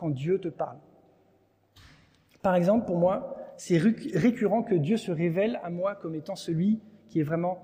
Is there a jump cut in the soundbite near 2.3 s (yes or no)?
no